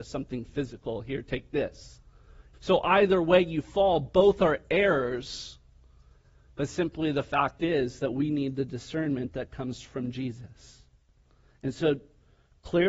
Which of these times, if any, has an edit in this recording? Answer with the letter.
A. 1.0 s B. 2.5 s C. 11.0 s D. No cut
B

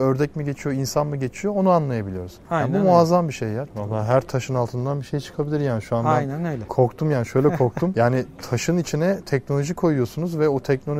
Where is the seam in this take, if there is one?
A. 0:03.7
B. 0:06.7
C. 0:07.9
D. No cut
A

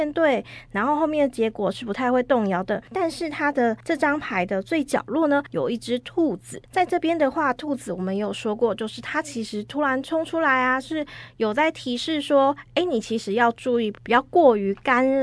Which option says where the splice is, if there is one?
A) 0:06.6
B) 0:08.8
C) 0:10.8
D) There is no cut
D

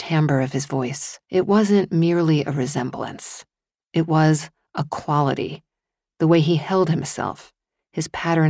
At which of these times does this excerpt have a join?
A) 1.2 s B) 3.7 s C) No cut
A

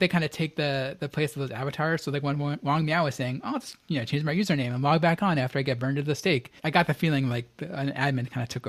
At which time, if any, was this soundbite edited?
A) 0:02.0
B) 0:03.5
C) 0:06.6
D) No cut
C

